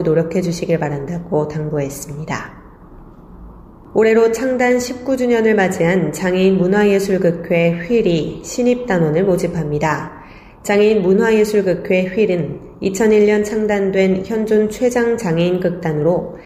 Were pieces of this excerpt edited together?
no; 0 cuts

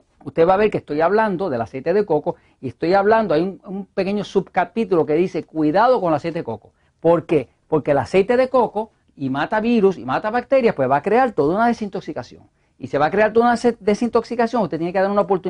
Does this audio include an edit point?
yes; 2 cuts; at 6.8 s, 9.0 s

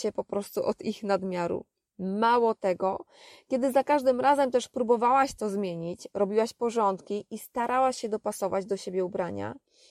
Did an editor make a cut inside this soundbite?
no; 0 cuts

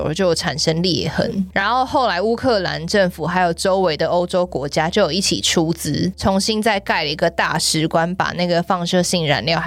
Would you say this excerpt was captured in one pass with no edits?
yes; 0 cuts

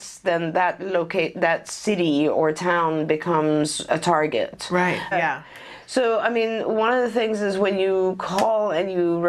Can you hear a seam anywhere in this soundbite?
yes; 1 cut; at 5.1 s

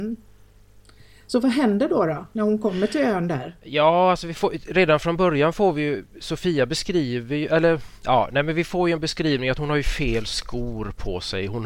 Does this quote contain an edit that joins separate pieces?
no; 0 cuts

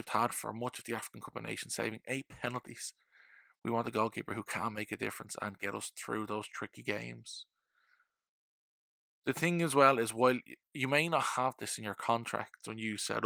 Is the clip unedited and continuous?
yes; 0 cuts

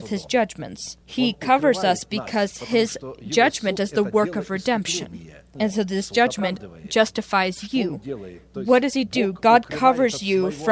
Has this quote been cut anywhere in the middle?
yes; 2 cuts; at 1.0 s, 5.5 s

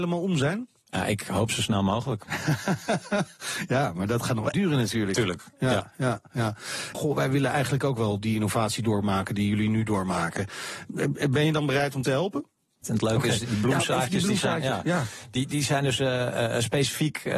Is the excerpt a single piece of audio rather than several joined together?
no; 3 cuts; at 4.5 s, 6.9 s, 12.8 s

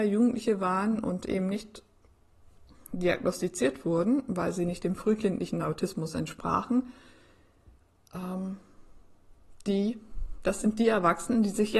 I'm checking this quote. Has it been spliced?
no; 0 cuts

